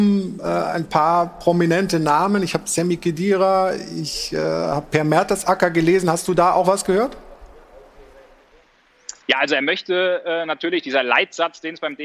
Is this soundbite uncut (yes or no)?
no